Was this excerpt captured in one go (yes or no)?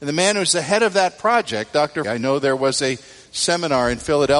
no